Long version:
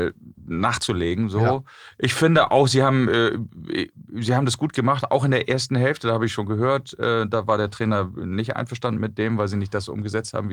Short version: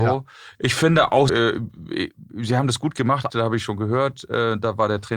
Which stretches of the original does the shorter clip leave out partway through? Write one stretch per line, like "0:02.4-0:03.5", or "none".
0:02.7-0:03.1
0:05.1-0:06.0